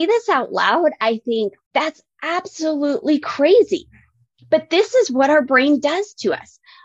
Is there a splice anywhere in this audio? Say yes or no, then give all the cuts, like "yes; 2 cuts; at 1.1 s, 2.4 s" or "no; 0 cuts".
yes; 1 cut; at 1.7 s